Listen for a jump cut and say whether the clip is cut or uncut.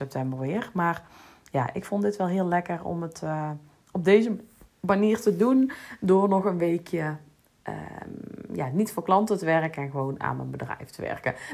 uncut